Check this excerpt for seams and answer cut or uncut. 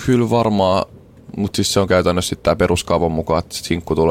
uncut